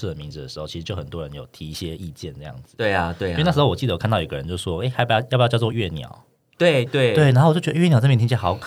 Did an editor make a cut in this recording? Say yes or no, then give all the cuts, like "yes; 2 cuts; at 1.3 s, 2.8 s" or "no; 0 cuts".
yes; 2 cuts; at 5.7 s, 6.9 s